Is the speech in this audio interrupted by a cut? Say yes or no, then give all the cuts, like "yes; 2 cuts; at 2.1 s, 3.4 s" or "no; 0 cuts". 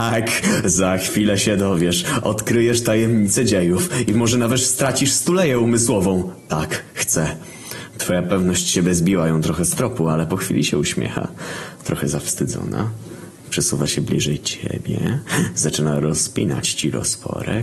no; 0 cuts